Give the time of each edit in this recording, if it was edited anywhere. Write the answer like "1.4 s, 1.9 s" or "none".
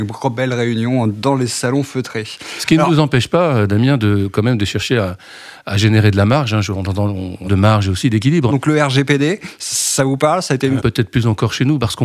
7.4 s, 8.5 s, 10.8 s